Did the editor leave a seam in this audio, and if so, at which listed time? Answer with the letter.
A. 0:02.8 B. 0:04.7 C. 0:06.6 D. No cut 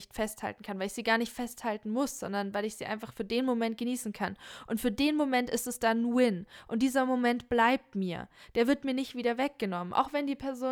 D